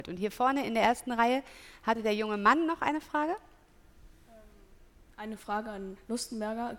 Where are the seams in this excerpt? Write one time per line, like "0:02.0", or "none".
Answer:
none